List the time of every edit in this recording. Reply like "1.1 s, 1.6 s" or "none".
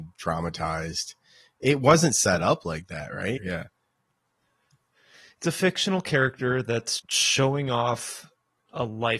3.4 s, 7.0 s

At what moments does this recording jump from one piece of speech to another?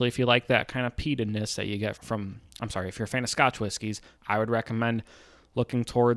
1.9 s, 4.2 s

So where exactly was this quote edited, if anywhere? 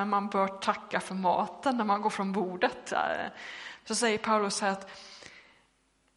3.8 s

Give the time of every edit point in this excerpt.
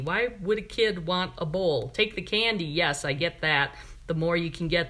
none

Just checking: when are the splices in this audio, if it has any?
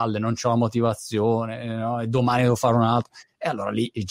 none

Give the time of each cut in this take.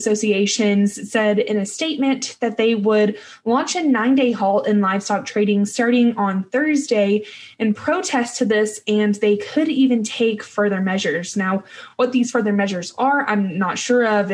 none

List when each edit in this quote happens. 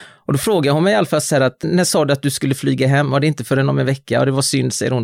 1.6 s

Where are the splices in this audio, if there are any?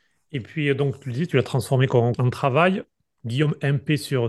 none

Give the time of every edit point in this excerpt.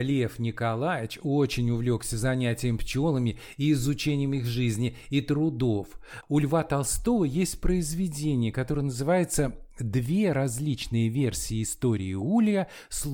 6.2 s

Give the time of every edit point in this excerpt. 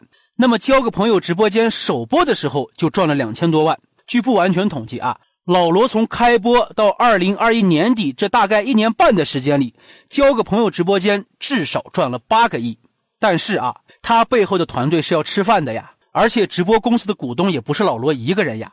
7.6 s, 13.9 s

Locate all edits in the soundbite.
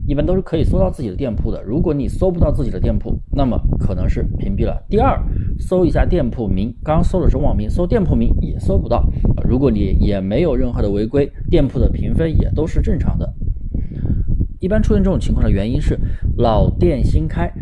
7.4 s, 9.4 s, 14.6 s

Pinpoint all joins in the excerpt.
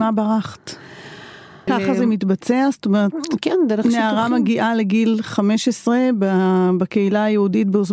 1.7 s

